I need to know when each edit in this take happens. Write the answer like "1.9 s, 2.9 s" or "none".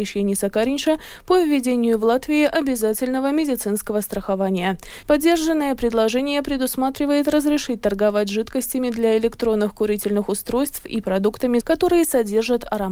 5.0 s, 11.6 s